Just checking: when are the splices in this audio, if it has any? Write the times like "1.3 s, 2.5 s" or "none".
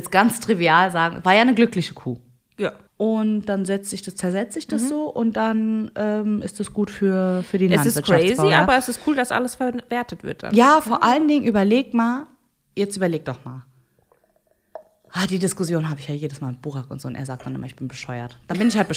2.9 s

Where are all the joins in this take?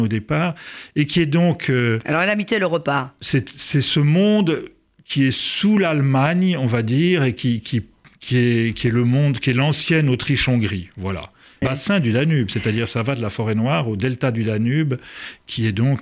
11.6 s

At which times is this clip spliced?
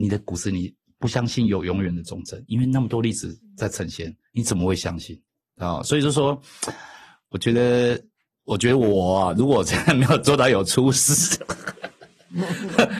none

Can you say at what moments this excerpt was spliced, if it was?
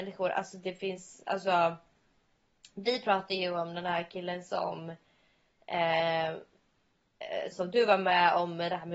7.5 s

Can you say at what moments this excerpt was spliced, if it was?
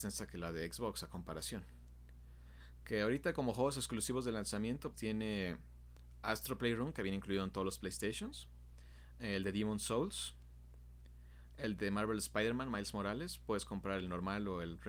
4.9 s

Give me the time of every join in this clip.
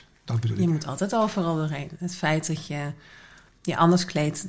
none

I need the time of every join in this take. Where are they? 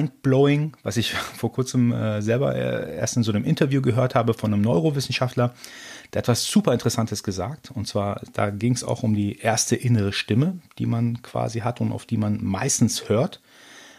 none

